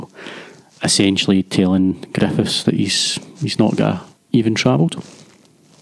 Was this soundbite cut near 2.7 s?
no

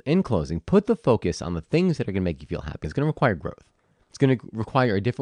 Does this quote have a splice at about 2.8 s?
yes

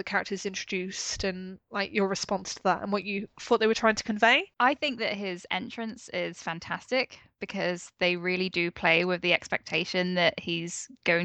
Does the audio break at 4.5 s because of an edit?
yes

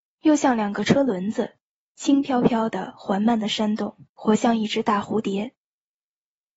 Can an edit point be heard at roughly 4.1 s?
yes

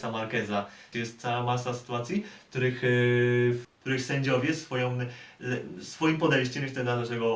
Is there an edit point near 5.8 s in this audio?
no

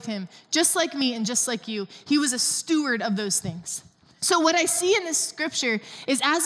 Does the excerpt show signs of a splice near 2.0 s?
no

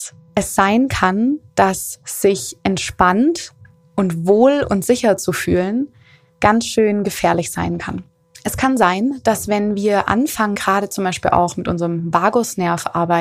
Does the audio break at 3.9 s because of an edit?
no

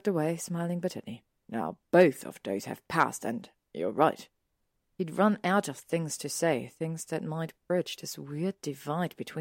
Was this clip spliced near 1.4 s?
yes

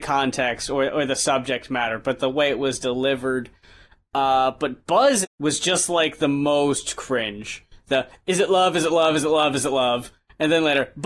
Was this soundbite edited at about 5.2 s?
yes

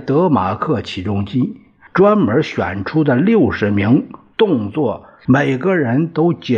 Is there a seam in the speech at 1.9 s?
yes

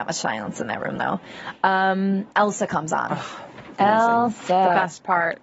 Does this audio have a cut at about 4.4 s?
no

